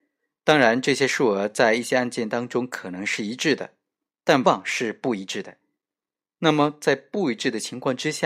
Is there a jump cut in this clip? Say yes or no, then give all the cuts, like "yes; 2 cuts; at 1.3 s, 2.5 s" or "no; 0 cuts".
yes; 1 cut; at 4.4 s